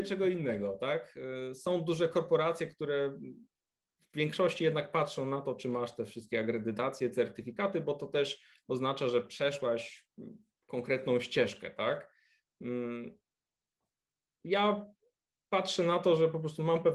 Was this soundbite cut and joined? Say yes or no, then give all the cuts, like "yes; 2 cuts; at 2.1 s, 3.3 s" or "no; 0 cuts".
no; 0 cuts